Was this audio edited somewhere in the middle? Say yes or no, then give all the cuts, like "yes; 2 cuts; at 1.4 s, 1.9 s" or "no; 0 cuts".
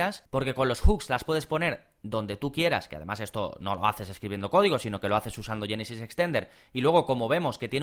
no; 0 cuts